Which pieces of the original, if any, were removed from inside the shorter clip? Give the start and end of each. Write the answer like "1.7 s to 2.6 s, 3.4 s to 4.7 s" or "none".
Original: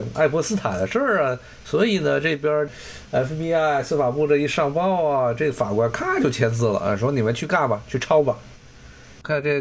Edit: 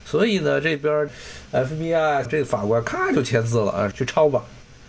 3.8 s to 5.3 s, 7.0 s to 7.8 s